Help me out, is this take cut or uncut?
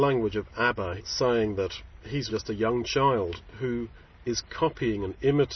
cut